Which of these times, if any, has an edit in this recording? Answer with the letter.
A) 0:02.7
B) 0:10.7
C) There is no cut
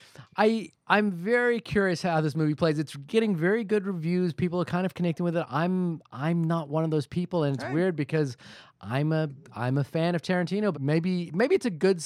B